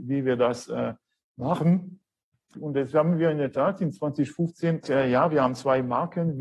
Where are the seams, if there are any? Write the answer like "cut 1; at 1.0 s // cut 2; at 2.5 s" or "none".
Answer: cut 1; at 2.5 s // cut 2; at 4.8 s